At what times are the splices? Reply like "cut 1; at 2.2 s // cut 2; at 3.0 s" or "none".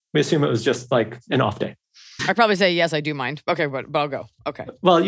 cut 1; at 2.2 s